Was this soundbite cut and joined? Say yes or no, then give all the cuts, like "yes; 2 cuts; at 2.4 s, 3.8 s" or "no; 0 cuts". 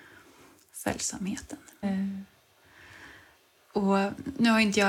yes; 1 cut; at 1.8 s